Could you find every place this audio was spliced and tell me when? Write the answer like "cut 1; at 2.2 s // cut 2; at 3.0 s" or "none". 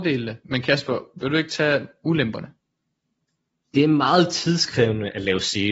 cut 1; at 3.6 s